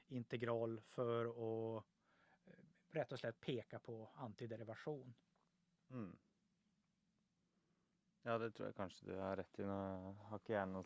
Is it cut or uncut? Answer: uncut